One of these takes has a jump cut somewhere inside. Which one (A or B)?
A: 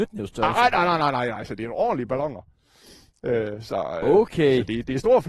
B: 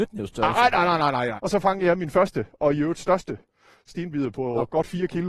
B